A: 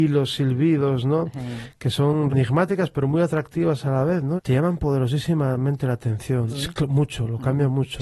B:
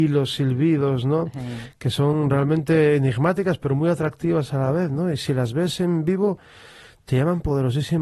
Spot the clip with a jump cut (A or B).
A